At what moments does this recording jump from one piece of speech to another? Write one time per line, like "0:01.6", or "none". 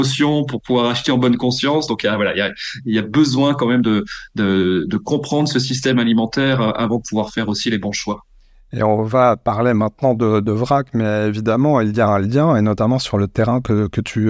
none